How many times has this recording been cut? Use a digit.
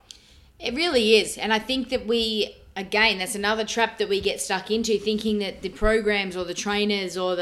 0